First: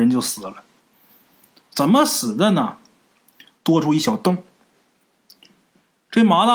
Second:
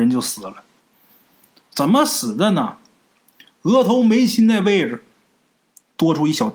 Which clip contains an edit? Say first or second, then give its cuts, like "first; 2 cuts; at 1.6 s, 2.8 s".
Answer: first; 1 cut; at 3.5 s